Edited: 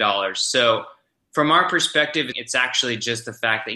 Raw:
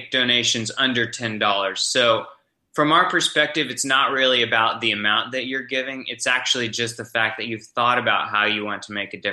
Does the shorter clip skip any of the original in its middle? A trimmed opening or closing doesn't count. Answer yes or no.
yes